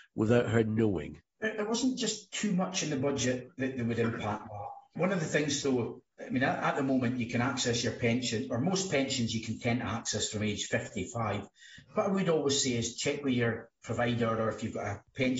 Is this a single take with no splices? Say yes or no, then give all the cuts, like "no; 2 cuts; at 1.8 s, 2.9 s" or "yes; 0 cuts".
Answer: yes; 0 cuts